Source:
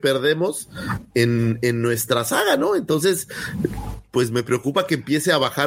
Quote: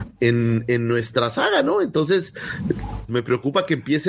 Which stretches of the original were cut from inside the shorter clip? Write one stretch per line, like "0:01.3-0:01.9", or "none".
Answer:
0:04.0-0:04.3